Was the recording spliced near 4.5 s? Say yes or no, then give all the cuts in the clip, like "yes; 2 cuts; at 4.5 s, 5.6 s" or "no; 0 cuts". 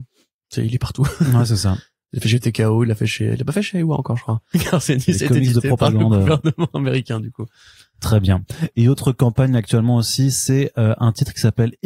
yes; 1 cut; at 4.5 s